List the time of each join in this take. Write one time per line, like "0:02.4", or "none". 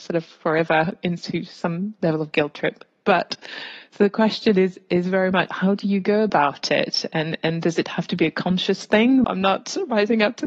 0:09.2